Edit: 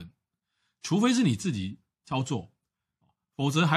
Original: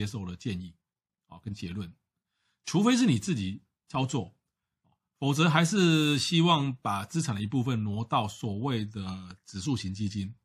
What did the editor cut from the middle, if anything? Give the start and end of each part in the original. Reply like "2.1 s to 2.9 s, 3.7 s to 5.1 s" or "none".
none